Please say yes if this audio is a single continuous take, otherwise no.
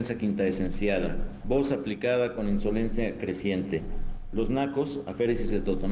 no